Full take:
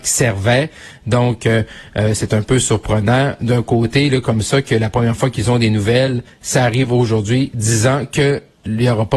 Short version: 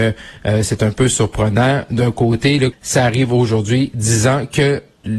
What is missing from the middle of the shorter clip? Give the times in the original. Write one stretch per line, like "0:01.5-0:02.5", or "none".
0:04.2-0:06.3